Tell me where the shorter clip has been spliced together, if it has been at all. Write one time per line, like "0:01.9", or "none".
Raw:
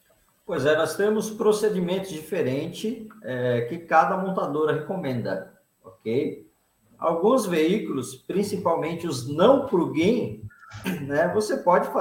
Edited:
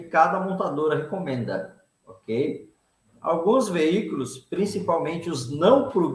none